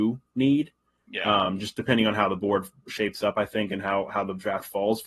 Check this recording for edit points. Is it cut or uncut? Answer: uncut